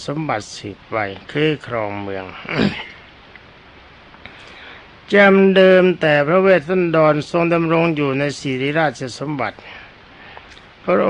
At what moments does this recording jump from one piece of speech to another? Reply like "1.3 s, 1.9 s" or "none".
none